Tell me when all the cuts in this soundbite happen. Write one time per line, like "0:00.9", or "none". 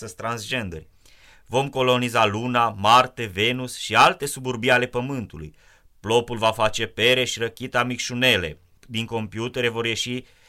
0:08.8